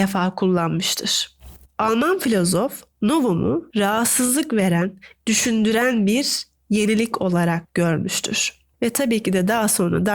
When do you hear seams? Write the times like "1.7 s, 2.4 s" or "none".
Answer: 5.2 s